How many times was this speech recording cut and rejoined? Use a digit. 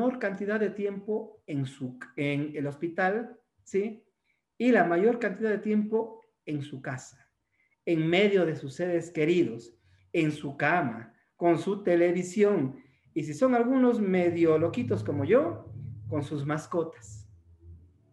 0